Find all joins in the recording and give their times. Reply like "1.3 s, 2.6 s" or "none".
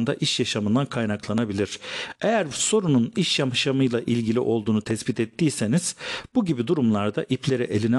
none

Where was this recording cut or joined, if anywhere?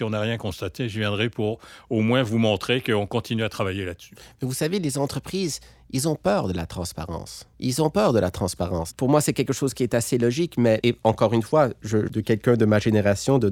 7.5 s, 10.8 s, 12.1 s

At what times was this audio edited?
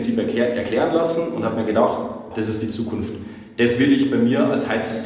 2.3 s

